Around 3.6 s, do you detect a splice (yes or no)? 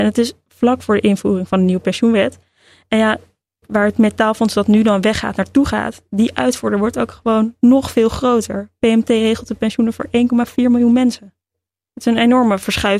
yes